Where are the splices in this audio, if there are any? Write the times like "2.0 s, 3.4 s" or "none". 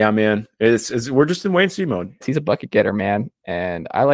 2.2 s